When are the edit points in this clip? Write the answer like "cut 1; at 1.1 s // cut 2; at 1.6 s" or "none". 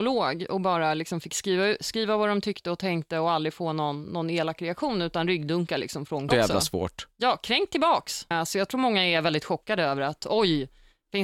cut 1; at 6.3 s // cut 2; at 8.3 s